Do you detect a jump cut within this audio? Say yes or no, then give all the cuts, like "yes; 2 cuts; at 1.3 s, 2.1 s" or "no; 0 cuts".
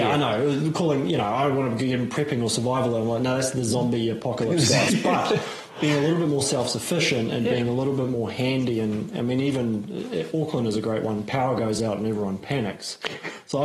no; 0 cuts